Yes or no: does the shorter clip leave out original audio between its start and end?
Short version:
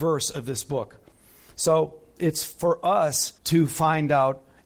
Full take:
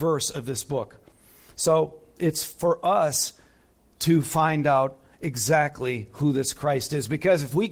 yes